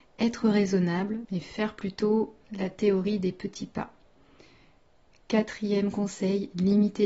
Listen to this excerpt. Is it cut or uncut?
cut